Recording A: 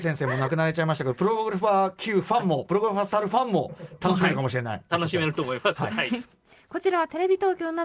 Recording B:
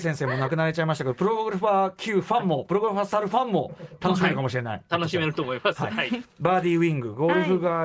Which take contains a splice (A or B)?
A